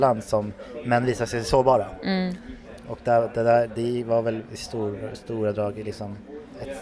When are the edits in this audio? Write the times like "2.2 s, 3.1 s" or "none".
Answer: none